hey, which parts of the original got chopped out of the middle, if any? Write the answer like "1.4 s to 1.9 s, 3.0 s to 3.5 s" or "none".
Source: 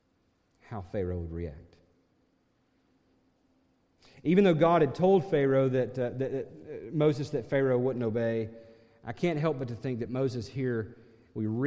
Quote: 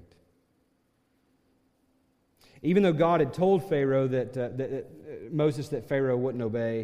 none